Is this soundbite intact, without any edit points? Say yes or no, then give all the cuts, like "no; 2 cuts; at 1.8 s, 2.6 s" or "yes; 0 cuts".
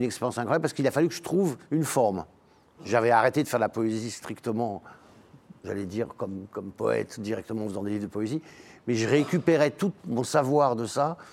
no; 1 cut; at 2.7 s